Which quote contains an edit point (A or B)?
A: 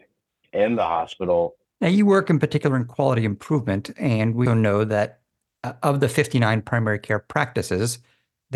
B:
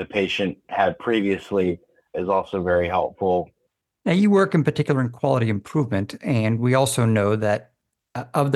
A